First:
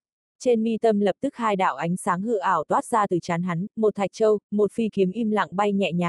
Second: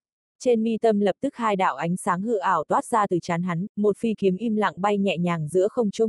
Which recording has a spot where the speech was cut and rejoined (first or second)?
second